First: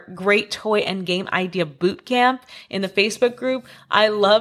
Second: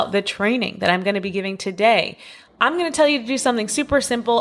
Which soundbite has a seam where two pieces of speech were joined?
second; 1 cut; at 2.5 s

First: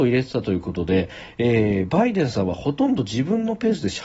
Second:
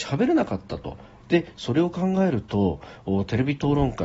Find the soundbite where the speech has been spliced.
second; 1 cut; at 1.2 s

